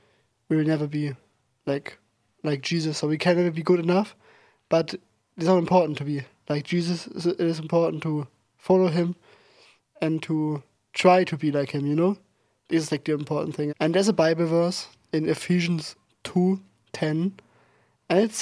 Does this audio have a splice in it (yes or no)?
yes